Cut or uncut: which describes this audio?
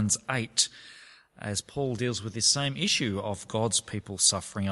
uncut